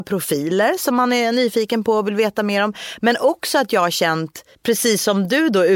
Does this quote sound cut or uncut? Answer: cut